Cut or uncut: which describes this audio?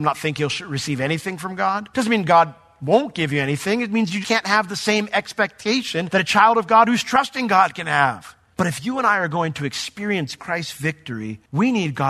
cut